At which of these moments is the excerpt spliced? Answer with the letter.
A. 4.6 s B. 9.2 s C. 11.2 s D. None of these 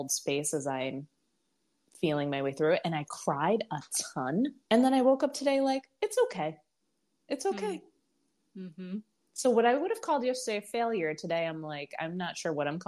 A